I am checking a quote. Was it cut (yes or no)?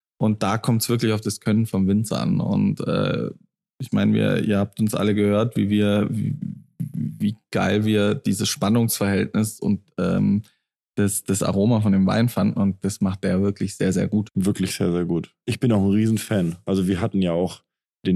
no